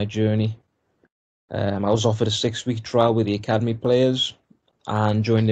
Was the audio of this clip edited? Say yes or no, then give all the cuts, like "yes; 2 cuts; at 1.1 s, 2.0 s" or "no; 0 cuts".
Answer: no; 0 cuts